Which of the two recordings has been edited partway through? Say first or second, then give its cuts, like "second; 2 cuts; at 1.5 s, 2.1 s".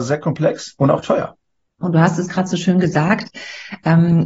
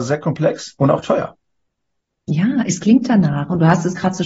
first; 1 cut; at 1.8 s